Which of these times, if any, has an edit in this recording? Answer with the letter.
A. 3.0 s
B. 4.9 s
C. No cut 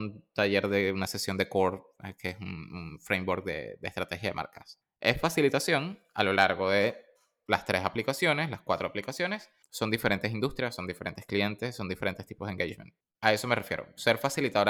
C